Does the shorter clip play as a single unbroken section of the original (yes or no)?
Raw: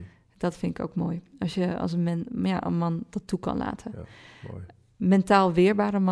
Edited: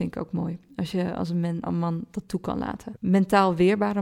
no